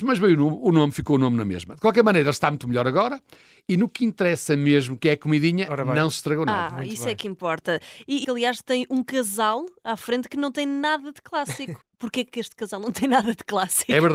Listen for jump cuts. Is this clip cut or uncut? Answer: cut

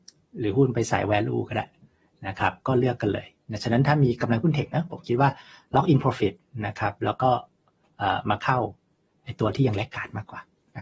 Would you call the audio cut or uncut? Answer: uncut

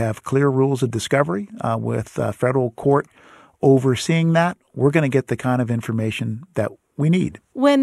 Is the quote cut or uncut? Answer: uncut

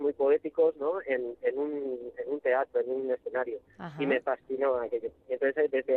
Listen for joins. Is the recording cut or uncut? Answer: uncut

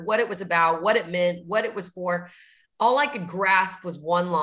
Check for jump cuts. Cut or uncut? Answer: uncut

